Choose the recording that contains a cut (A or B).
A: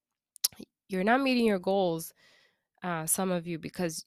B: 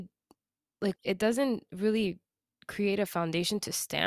B